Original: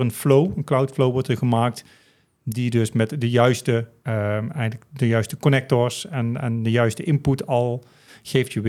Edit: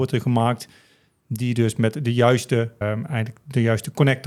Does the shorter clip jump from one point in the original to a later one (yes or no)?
yes